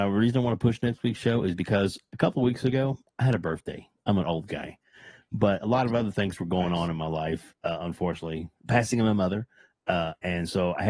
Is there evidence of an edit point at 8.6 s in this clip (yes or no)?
yes